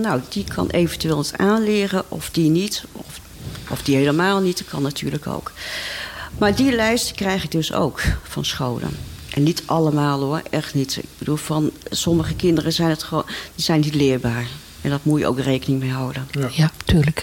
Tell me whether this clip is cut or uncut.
uncut